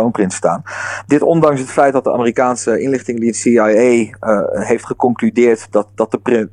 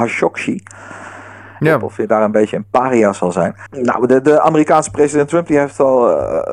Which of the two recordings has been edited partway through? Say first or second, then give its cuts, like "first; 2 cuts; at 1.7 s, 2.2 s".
second; 2 cuts; at 1.6 s, 3.7 s